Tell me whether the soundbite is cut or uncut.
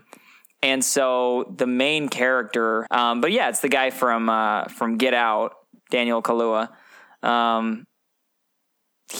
cut